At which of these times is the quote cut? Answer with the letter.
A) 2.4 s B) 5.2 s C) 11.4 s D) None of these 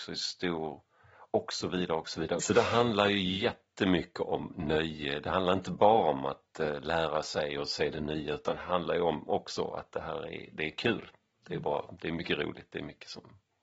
A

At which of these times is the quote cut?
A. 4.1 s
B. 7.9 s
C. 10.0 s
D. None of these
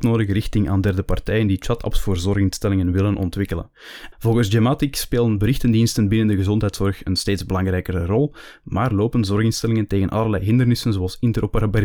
A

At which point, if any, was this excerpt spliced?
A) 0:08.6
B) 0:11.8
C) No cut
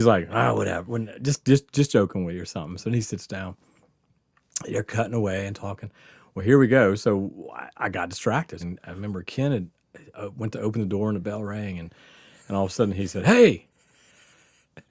A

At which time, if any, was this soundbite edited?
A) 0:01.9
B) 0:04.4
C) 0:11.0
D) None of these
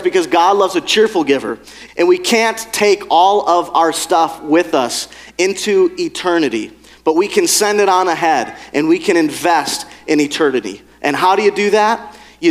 A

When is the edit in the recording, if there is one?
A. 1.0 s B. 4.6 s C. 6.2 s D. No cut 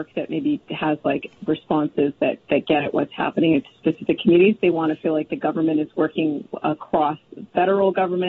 B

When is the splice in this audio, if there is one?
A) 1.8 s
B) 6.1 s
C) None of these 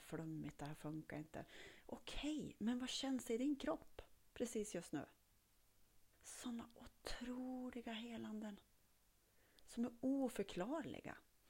B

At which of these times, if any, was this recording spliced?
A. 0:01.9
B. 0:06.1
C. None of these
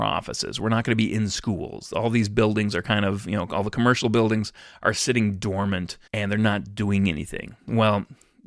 B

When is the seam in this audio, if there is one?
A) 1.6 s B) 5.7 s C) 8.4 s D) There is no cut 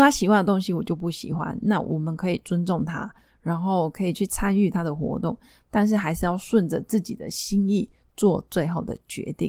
D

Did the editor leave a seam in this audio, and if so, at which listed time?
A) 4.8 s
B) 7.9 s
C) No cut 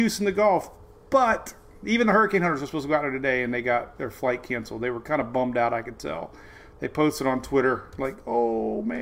C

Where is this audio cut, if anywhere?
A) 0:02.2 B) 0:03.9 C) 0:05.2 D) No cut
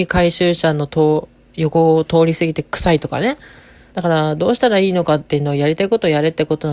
B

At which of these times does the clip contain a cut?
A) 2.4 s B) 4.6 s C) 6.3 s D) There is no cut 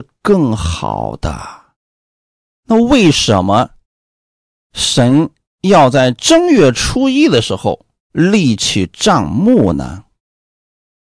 A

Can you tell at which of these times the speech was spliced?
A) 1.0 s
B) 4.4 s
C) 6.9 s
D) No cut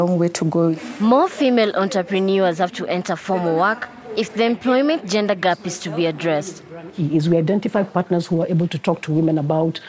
C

